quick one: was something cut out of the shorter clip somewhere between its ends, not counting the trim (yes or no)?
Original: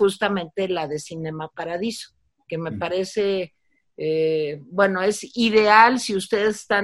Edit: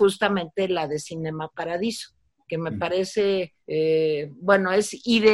yes